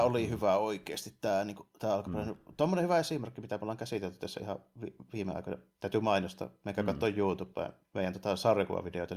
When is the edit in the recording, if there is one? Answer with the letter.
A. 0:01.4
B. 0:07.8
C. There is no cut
B